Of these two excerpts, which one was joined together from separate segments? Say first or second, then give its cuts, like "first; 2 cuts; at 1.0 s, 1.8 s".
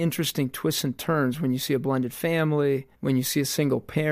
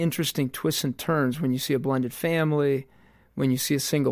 first; 1 cut; at 2.9 s